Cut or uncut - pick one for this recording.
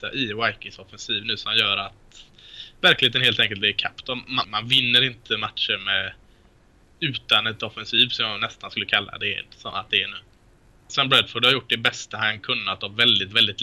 cut